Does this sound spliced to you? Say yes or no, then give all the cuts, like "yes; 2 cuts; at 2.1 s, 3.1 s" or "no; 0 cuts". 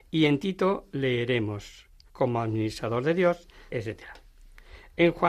yes; 2 cuts; at 2.1 s, 3.7 s